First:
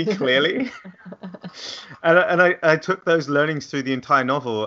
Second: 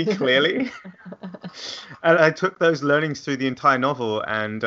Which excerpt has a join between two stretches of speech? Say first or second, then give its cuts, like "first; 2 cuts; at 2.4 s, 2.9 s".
second; 1 cut; at 2.1 s